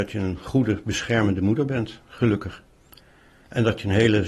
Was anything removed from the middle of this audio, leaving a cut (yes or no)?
no